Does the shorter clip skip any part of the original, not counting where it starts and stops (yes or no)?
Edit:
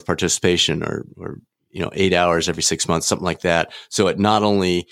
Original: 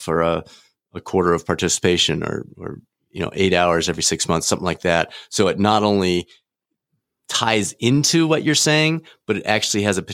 no